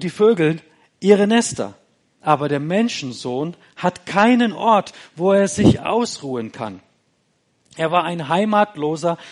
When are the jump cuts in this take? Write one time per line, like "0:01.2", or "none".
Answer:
none